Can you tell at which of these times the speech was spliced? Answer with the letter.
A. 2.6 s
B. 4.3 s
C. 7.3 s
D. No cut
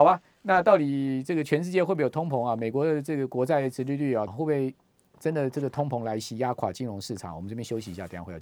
B